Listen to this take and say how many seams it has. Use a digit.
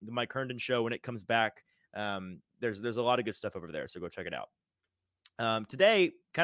0